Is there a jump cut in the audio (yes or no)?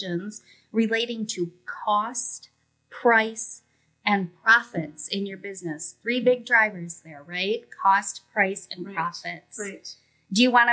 no